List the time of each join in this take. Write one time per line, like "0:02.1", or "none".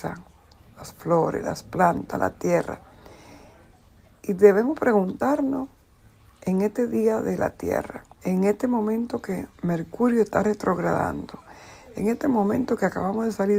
0:08.1
0:09.5